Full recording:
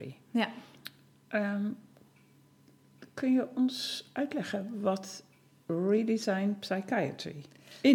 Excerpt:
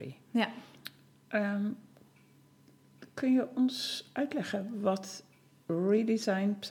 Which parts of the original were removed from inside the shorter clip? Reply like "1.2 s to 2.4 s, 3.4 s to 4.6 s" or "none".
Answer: none